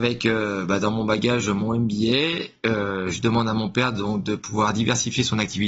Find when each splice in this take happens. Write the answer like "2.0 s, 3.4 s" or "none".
none